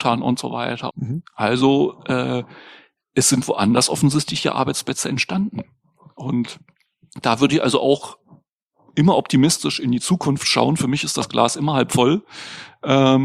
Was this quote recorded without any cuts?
no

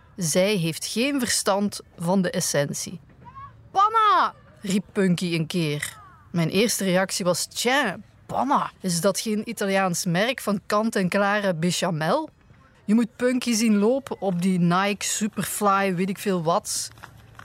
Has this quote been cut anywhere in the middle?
yes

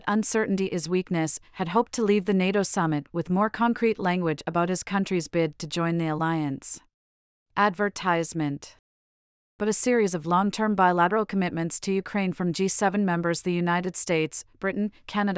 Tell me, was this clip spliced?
yes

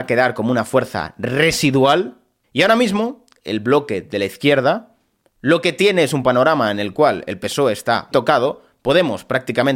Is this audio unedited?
no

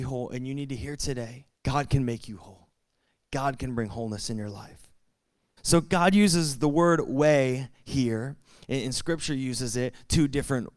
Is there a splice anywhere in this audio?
yes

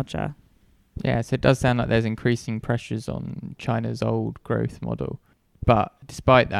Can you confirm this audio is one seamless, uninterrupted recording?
yes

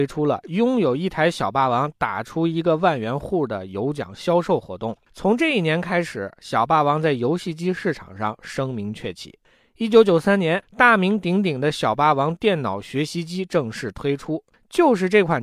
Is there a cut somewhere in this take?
no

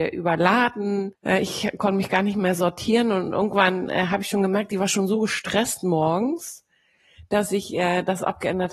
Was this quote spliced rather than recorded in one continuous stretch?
yes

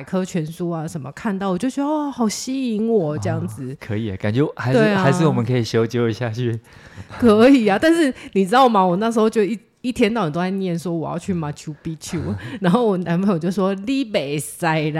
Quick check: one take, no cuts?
yes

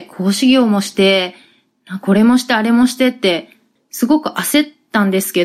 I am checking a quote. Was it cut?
yes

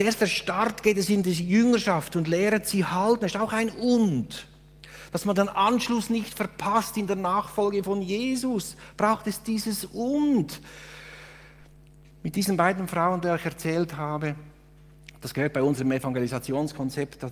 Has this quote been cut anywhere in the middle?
no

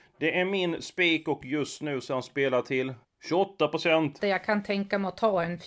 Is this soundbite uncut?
no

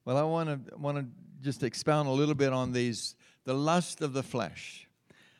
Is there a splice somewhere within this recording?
no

